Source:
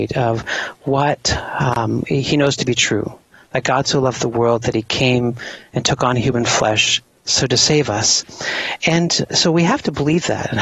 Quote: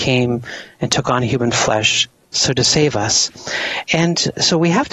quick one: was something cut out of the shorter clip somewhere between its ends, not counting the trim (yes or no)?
no